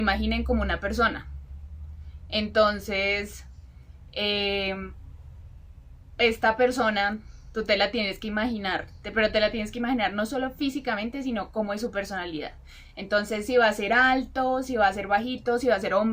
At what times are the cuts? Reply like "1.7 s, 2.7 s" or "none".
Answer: none

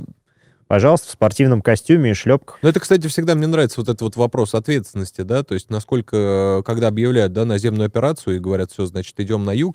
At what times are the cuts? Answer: none

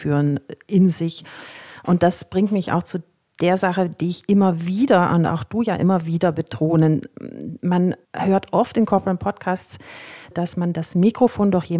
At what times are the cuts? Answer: 8.0 s, 10.3 s

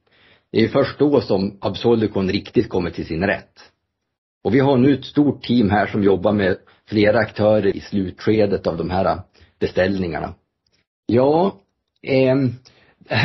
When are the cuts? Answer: 7.7 s, 10.9 s

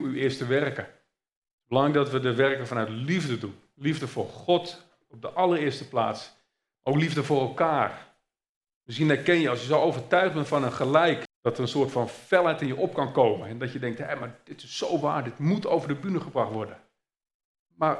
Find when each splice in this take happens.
11.3 s

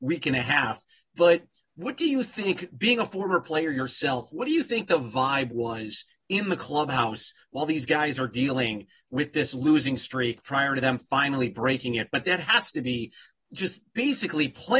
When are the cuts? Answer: none

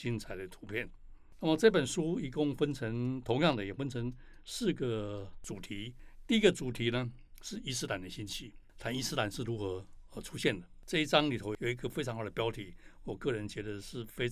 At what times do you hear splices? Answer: none

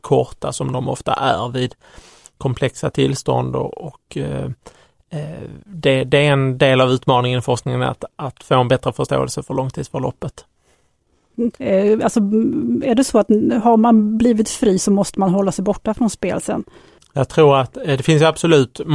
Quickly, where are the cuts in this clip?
11.5 s

